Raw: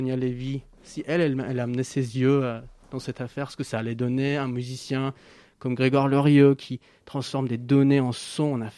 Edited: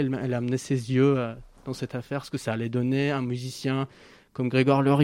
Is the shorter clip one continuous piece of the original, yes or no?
yes